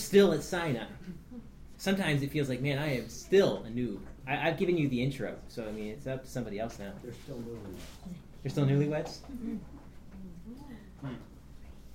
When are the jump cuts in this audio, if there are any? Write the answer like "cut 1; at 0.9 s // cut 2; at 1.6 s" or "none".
cut 1; at 1.7 s // cut 2; at 4.2 s